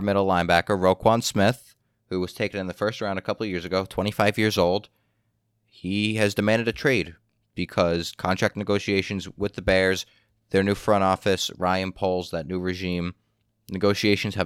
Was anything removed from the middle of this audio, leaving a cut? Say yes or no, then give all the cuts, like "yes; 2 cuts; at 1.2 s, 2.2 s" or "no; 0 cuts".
no; 0 cuts